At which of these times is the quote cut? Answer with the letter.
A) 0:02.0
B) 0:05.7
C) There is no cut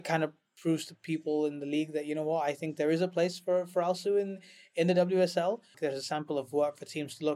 B